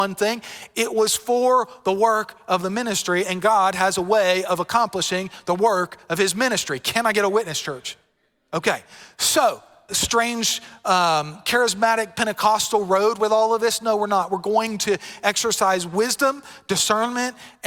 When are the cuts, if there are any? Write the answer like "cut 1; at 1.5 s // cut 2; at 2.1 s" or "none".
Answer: cut 1; at 9.9 s